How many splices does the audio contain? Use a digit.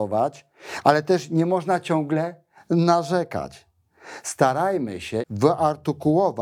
1